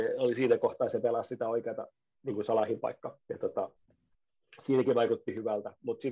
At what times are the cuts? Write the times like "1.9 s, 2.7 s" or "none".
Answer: 3.2 s